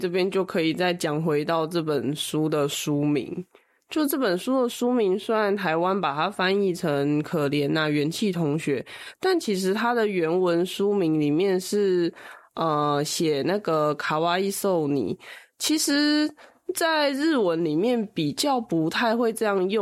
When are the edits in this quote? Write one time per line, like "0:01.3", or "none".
none